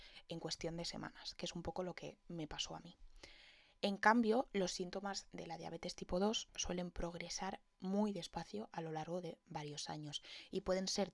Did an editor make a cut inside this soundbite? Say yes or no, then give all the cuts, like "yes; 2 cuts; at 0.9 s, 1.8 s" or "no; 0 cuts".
no; 0 cuts